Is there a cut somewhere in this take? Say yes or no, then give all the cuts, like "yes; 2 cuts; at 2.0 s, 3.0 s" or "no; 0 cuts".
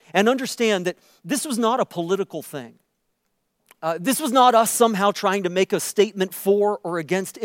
no; 0 cuts